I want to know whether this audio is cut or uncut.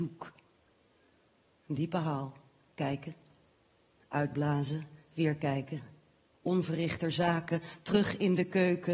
uncut